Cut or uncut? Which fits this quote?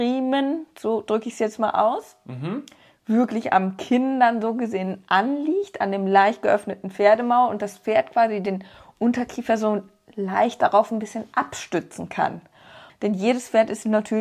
cut